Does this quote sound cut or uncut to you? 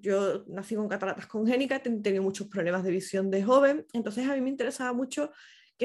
uncut